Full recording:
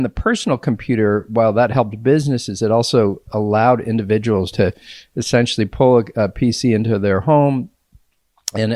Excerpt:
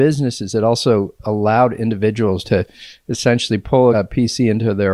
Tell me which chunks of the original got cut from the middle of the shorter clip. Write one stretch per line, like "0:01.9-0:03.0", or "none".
0:06.0-0:06.2